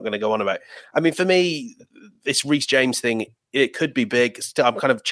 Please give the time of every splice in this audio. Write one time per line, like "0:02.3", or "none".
none